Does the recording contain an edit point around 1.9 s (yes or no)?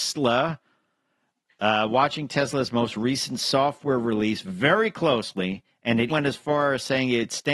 no